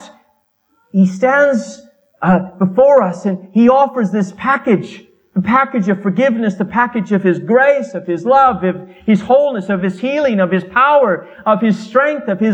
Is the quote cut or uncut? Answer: uncut